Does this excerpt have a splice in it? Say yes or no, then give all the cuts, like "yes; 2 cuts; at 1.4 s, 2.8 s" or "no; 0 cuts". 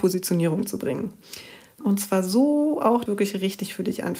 yes; 2 cuts; at 1.8 s, 3.1 s